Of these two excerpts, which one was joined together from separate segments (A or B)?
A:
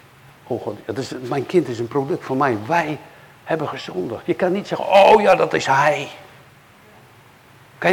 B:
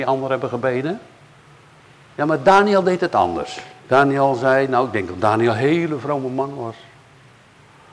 B